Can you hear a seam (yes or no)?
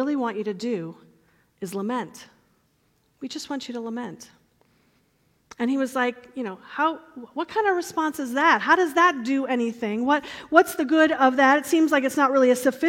no